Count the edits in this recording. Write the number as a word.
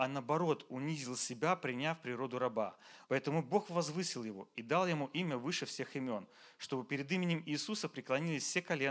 one